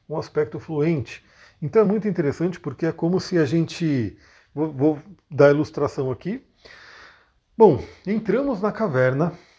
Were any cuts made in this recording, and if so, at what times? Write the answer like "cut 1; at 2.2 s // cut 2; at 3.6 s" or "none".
none